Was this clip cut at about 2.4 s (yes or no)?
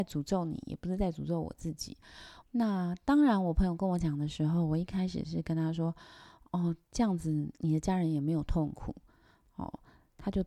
yes